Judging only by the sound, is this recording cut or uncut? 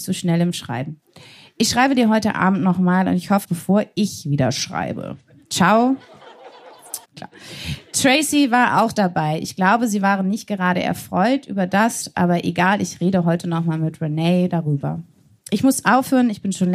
cut